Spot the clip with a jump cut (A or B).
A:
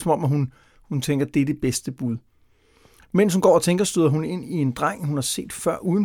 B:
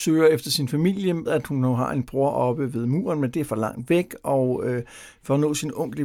B